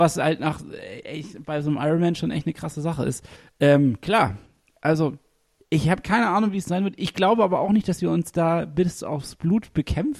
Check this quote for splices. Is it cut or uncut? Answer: uncut